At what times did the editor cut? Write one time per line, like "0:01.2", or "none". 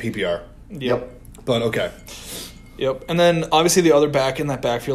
none